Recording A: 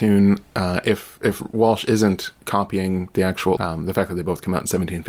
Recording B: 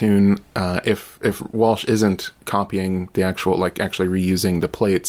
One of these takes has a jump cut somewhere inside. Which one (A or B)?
A